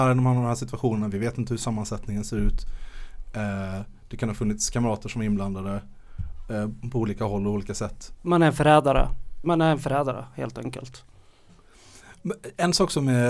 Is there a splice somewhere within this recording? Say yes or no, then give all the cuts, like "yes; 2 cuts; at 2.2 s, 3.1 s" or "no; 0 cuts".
yes; 2 cuts; at 8.2 s, 9.4 s